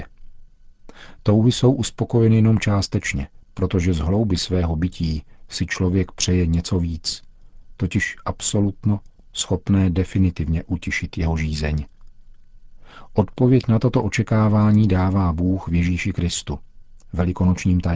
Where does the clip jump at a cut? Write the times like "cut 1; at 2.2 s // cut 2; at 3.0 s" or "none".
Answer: cut 1; at 3.4 s